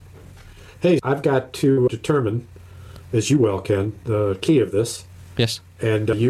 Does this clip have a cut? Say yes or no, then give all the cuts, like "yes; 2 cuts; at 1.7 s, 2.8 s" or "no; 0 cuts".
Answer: no; 0 cuts